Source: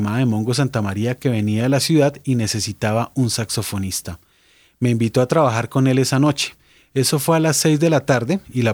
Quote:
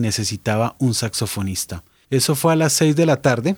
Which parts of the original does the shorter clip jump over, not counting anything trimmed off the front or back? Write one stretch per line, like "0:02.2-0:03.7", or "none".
0:04.4-0:06.9